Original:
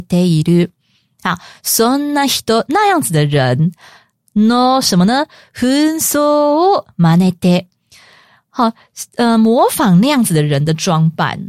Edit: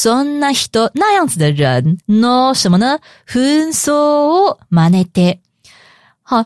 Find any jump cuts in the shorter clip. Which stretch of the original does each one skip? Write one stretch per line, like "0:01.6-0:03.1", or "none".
0:03.8-0:04.3